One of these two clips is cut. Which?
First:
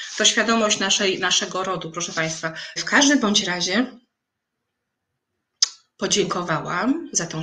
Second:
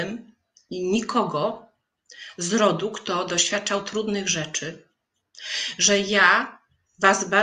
first; 1 cut; at 2.8 s

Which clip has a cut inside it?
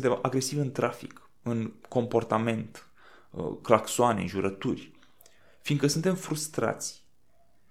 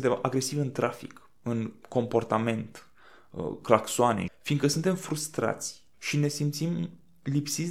second; 2 cuts; at 4.3 s, 5.9 s

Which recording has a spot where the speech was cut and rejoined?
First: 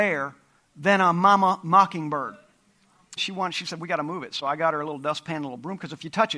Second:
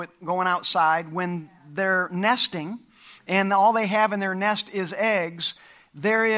first; 1 cut; at 3.2 s

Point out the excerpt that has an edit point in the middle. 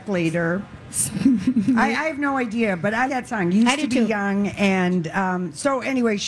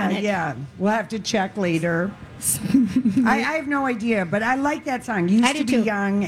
first; 1 cut; at 3.1 s

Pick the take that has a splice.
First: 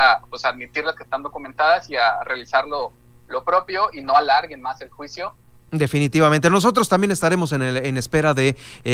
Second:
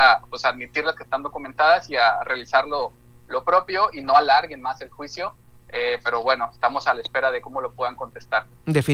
first; 1 cut; at 5.7 s

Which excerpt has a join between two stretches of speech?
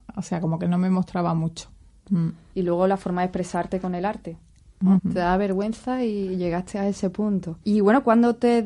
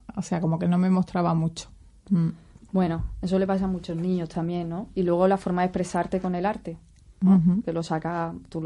first; 3 cuts; at 2.5 s, 5.0 s, 7.6 s

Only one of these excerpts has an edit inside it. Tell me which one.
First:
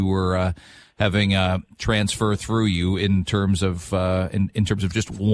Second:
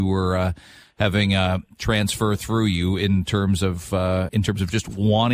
second; 1 cut; at 4.3 s

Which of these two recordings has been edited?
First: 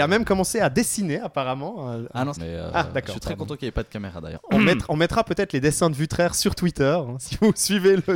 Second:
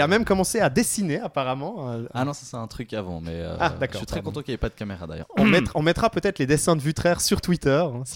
first; 1 cut; at 2.4 s

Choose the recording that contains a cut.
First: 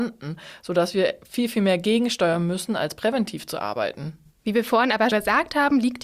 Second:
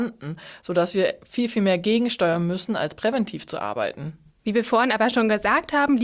first; 1 cut; at 5.1 s

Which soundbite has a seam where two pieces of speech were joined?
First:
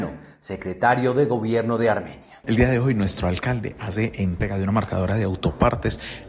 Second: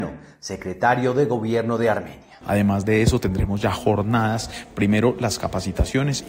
second; 1 cut; at 2.4 s

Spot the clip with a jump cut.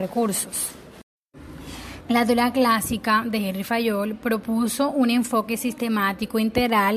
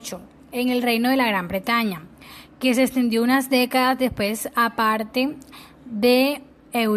first; 1 cut; at 2.0 s

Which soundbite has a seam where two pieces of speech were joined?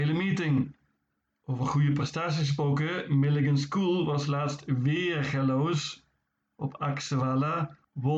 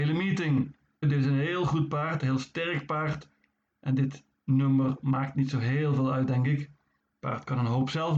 second; 1 cut; at 1.0 s

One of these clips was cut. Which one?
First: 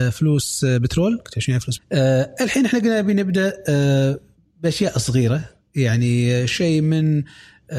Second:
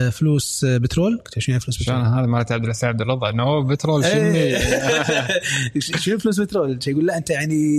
first; 1 cut; at 1.8 s

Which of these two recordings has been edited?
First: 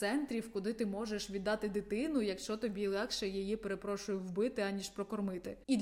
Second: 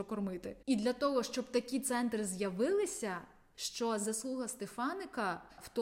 second; 1 cut; at 3.5 s

